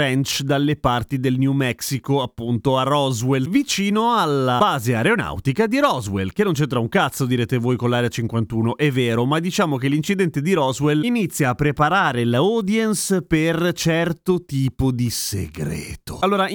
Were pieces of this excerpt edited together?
no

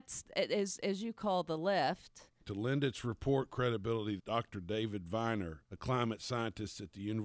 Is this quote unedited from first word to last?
no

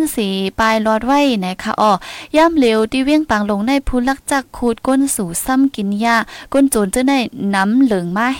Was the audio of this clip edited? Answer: no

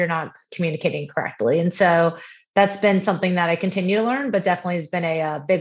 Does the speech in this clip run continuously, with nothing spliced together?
yes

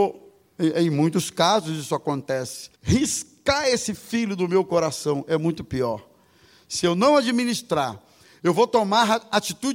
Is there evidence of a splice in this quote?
yes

